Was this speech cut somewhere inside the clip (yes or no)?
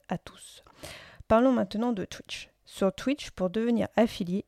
no